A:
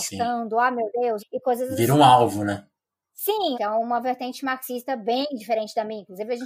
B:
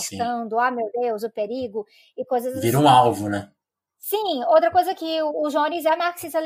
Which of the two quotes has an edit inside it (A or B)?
A